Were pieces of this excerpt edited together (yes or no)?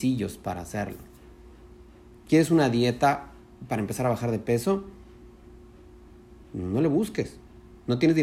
no